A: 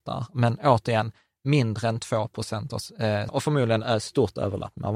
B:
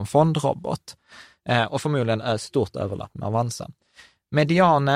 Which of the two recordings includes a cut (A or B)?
A